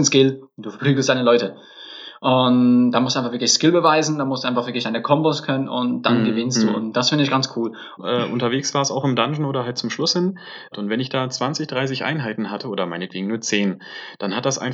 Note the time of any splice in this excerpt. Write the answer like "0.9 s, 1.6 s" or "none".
8.0 s, 10.7 s